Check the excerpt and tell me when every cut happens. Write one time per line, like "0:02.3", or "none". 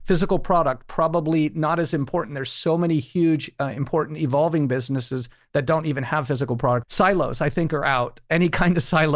0:06.8